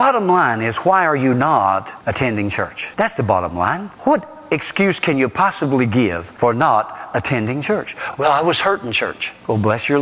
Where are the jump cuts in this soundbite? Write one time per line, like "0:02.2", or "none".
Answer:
none